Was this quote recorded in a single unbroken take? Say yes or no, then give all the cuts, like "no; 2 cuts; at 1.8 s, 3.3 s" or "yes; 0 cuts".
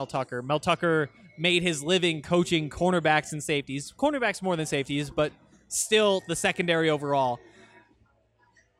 yes; 0 cuts